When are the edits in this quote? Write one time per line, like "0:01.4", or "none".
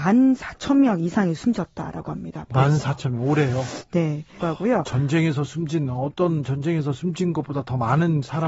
0:04.4